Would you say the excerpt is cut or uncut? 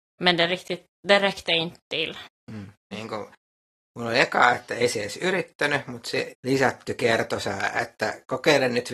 cut